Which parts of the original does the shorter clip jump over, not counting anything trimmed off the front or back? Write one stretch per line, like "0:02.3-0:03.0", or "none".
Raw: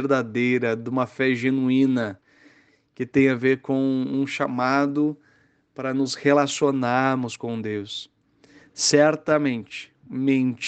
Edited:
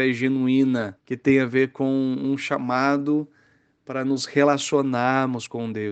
0:02.2-0:02.9